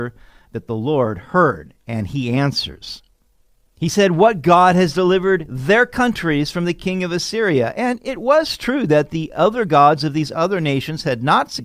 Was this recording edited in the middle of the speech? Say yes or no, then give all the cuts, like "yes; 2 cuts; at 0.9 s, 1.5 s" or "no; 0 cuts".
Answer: no; 0 cuts